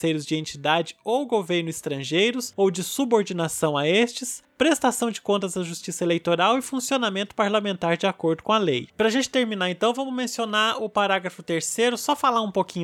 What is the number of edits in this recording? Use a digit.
1